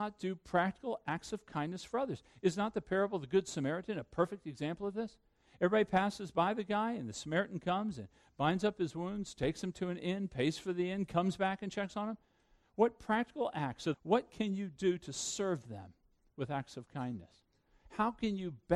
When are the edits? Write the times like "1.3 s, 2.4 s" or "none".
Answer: 13.9 s